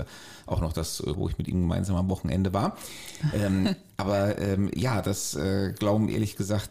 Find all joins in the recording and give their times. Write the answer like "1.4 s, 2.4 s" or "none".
1.2 s